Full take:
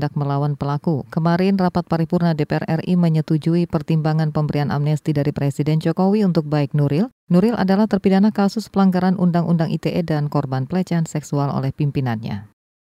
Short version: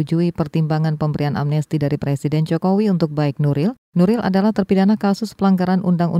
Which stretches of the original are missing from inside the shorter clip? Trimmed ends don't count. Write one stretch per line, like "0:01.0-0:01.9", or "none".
none